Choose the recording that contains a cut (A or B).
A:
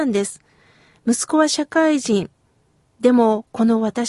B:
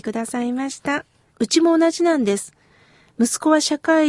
B